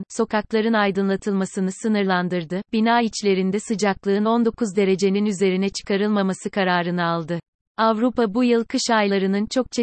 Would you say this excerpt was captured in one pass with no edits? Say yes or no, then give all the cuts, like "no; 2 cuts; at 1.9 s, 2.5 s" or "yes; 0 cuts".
no; 1 cut; at 7.7 s